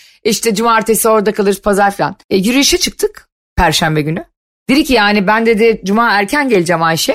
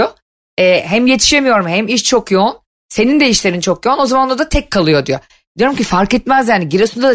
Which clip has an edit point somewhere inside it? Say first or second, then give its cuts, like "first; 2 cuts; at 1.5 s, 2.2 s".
first; 1 cut; at 2.2 s